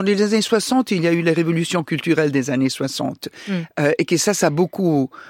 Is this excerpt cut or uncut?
uncut